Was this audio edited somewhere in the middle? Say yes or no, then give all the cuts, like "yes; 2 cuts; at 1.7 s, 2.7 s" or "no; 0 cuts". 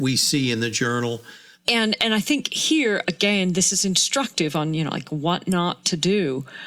yes; 1 cut; at 1.5 s